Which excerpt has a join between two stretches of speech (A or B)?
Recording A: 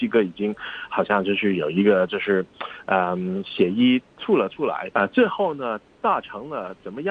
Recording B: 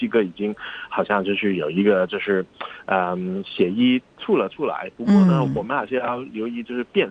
A